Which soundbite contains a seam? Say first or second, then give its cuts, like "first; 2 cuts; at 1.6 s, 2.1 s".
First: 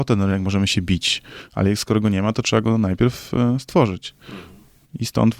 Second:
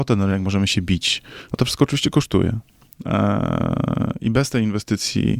second; 1 cut; at 1.5 s